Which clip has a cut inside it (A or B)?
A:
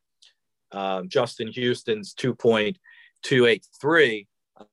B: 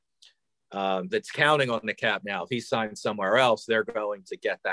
B